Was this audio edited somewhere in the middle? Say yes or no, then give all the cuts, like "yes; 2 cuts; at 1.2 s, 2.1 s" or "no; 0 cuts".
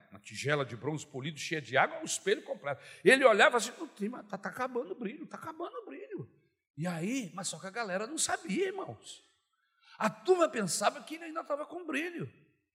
no; 0 cuts